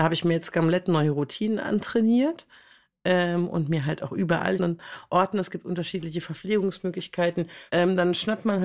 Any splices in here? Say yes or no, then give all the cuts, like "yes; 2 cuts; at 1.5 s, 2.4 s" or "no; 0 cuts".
yes; 2 cuts; at 4.6 s, 7.7 s